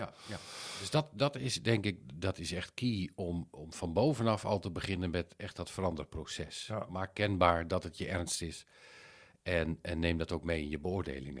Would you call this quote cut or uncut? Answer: uncut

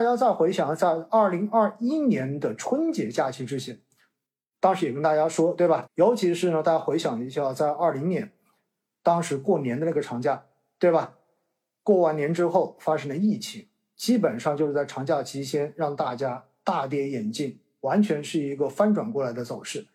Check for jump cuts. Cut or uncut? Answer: cut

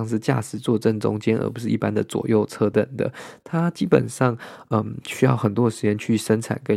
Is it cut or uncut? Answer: cut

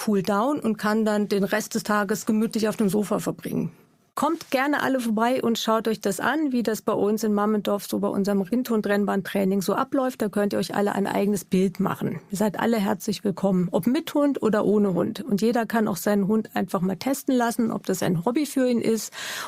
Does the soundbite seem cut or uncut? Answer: uncut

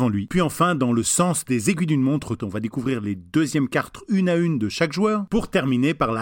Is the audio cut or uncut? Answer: cut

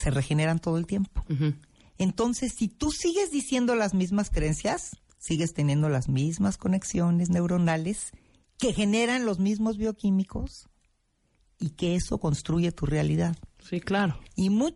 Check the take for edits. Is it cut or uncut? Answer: uncut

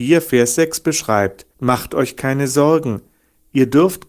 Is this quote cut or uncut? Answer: cut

